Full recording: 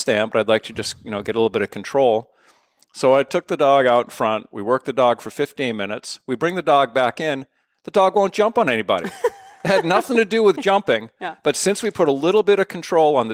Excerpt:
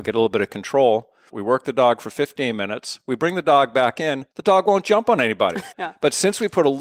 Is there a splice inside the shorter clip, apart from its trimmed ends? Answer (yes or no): yes